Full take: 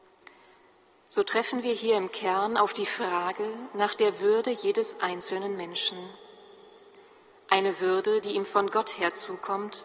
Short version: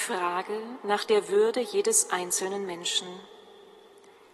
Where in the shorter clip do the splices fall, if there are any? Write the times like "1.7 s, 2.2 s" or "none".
none